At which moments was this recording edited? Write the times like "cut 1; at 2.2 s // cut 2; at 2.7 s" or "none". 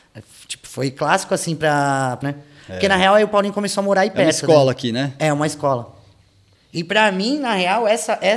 cut 1; at 2.2 s // cut 2; at 6.5 s